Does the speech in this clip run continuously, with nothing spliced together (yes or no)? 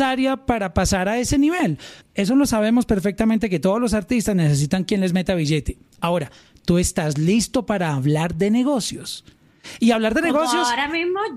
no